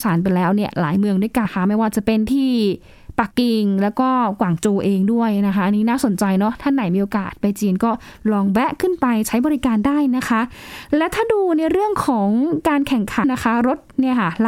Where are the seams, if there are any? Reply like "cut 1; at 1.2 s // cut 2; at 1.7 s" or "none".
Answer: cut 1; at 1.5 s // cut 2; at 3.3 s // cut 3; at 13.2 s

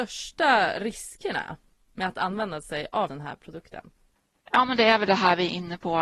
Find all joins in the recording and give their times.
cut 1; at 3.1 s

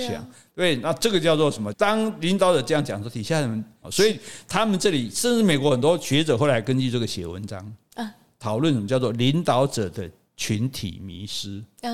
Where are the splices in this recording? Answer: cut 1; at 1.7 s // cut 2; at 3.8 s

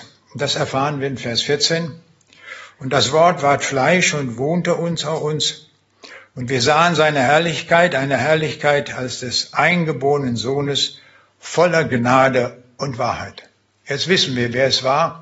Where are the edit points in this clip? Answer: none

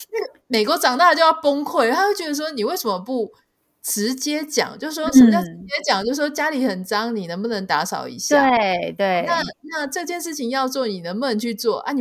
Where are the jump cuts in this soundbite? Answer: none

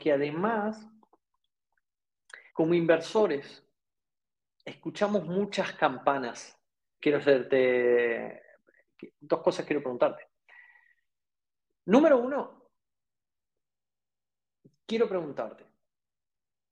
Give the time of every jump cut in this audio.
cut 1; at 2.5 s // cut 2; at 7.0 s

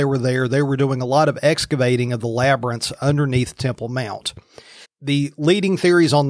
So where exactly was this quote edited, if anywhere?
cut 1; at 4.8 s

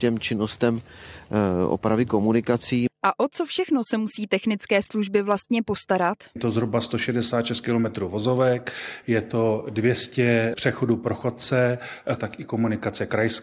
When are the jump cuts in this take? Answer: cut 1; at 9.0 s // cut 2; at 12.2 s

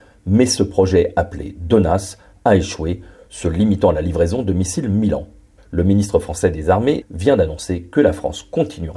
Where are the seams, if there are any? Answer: cut 1; at 5.6 s // cut 2; at 7.0 s

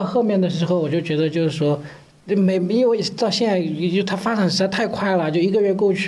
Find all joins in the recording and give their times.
none

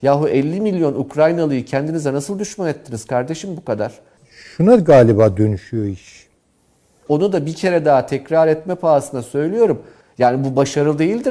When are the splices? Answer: cut 1; at 4.2 s // cut 2; at 7.1 s // cut 3; at 10.0 s

